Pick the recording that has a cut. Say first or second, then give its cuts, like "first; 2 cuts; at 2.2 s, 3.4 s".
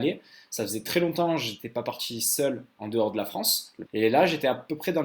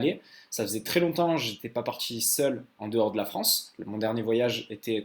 first; 1 cut; at 3.8 s